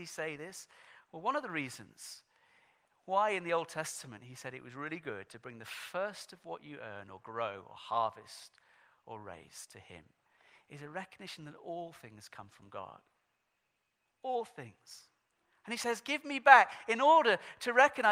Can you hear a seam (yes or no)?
no